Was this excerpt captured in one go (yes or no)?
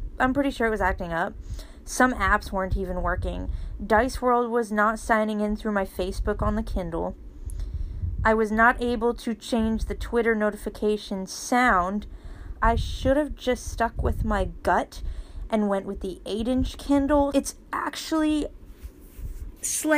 no